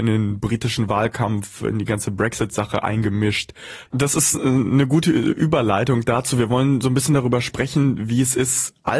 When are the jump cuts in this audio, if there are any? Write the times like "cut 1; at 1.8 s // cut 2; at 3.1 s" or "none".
cut 1; at 3.9 s